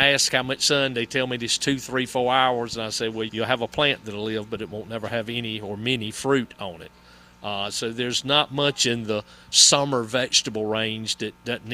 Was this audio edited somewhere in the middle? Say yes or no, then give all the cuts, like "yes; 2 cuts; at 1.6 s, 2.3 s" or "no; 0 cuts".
yes; 1 cut; at 3.3 s